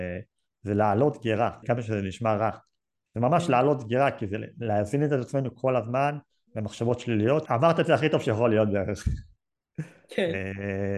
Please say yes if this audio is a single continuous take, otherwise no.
no